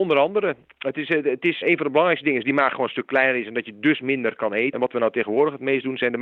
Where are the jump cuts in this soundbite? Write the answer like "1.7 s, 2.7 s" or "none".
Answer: 1.6 s, 4.7 s